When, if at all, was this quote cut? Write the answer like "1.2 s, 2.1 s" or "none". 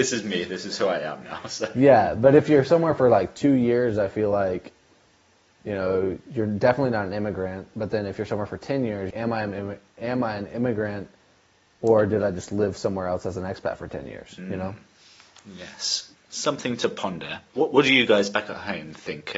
9.1 s, 16.1 s